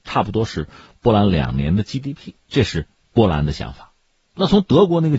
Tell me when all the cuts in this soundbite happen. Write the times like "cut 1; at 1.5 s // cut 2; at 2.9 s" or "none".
none